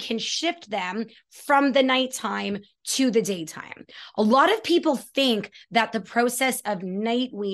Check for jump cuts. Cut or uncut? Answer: uncut